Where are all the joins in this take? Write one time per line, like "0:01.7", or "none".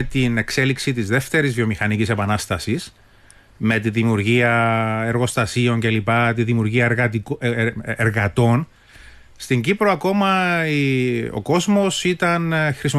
none